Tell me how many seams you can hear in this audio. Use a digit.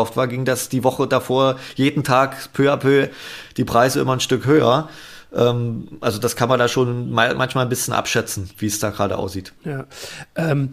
1